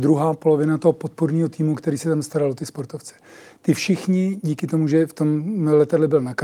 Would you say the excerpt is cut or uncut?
uncut